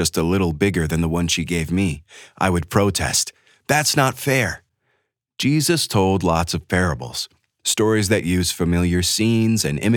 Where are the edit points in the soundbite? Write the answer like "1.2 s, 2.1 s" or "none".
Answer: none